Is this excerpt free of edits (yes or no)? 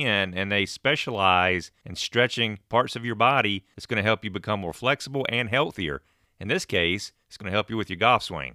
yes